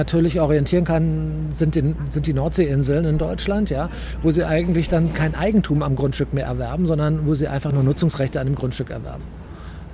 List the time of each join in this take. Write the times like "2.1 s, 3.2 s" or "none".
none